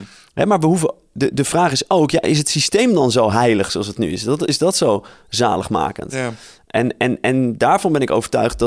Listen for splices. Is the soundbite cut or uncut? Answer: uncut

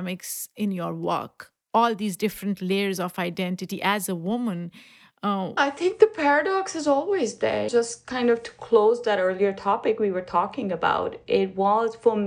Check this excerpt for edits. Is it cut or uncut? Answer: cut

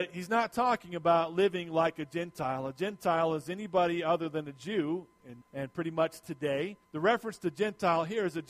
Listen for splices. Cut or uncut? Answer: cut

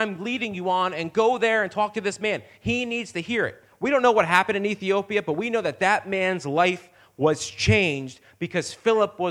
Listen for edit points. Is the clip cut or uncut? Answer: uncut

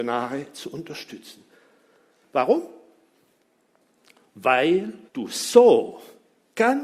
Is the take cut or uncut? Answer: cut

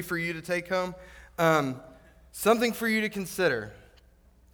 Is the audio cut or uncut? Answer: uncut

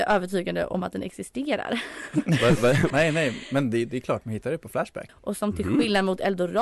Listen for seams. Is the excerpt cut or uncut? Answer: cut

